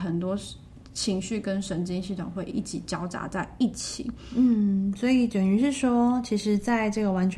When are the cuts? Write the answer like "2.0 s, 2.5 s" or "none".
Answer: none